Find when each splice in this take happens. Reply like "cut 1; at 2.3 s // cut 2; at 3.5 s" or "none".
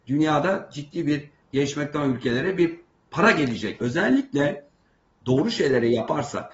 cut 1; at 3.8 s